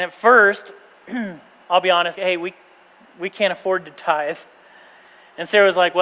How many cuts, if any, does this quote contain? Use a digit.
1